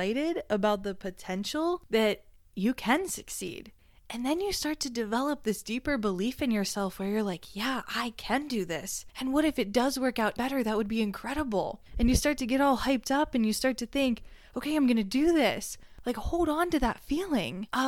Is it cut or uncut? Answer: cut